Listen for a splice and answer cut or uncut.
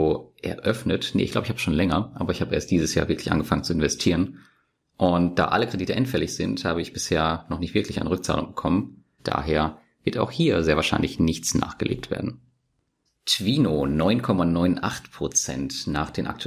cut